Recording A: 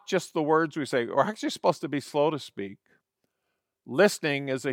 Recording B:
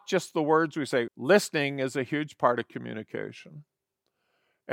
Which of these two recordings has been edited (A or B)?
B